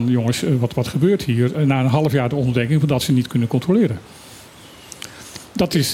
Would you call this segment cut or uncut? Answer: cut